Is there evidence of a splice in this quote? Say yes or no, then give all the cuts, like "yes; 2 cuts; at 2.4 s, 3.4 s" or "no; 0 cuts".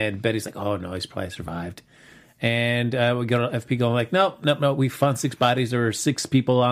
no; 0 cuts